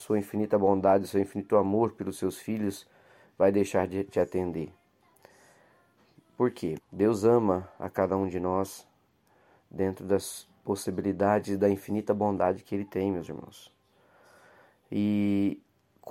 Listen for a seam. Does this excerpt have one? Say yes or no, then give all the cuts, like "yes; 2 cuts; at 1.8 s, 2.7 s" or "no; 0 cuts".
yes; 1 cut; at 6.8 s